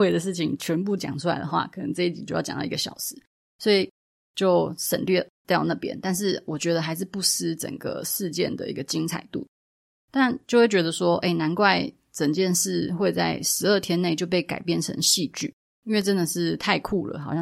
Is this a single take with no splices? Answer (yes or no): yes